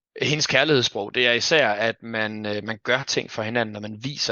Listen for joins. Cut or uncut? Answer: uncut